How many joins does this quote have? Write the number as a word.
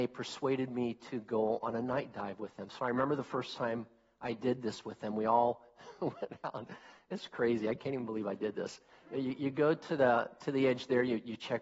zero